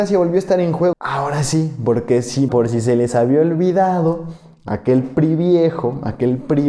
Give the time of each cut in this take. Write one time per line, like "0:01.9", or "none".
0:00.9
0:02.5